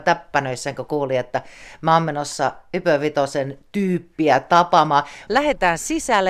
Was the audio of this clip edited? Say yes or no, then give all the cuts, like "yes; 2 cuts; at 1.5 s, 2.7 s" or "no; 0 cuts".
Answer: yes; 1 cut; at 5.3 s